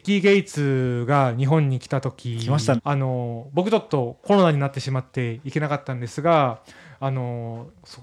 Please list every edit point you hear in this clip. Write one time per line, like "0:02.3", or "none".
0:02.8